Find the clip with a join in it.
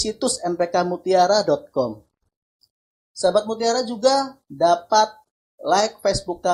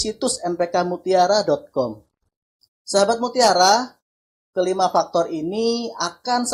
second; 1 cut; at 2.7 s

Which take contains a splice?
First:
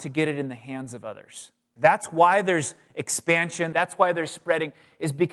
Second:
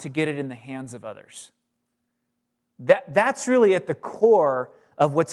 first; 2 cuts; at 1.8 s, 3.7 s

